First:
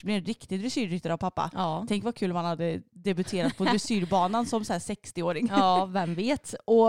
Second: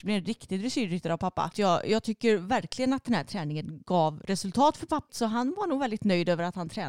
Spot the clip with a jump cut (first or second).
second